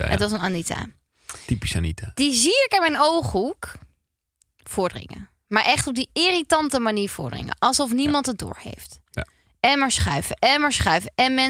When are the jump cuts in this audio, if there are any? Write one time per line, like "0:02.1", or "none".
none